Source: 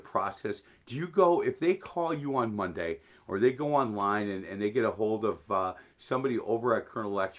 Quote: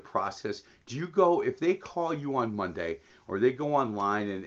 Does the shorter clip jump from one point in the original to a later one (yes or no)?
no